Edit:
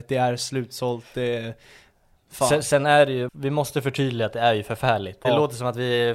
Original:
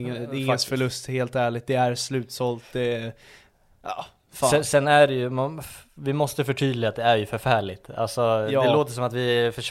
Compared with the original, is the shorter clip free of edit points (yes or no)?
no